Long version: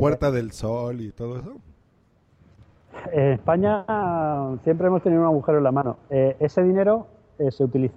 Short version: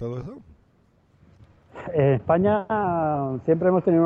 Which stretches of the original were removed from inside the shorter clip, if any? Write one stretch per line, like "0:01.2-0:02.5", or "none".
none